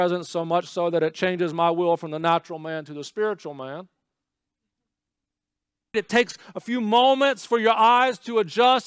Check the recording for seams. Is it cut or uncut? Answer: cut